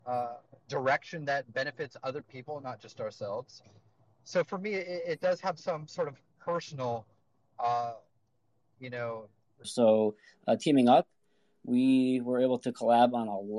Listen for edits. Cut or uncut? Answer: cut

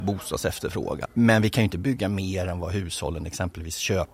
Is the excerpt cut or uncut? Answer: cut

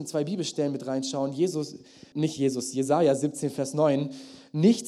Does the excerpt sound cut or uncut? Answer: cut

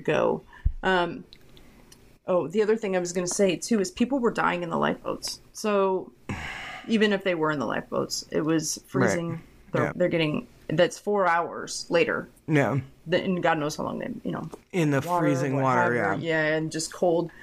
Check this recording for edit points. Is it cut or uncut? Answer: cut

